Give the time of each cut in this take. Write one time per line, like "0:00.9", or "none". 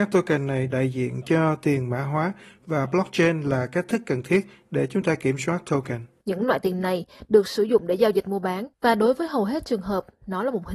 0:06.2
0:08.7